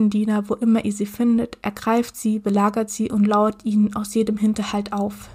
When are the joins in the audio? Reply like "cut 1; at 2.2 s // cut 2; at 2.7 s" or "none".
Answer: none